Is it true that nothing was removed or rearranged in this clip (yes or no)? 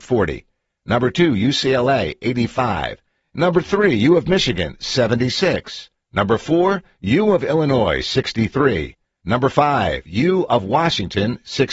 yes